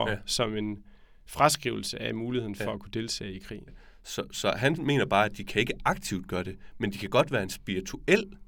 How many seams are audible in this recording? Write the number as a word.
one